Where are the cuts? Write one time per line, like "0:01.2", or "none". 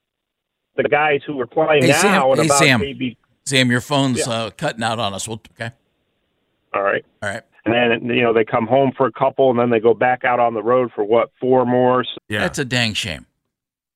0:05.5
0:07.5
0:12.1